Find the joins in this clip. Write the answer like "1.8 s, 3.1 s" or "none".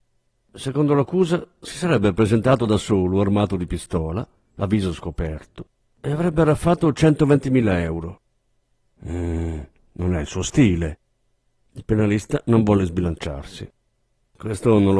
none